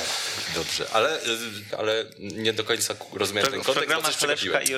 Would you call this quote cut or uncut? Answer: cut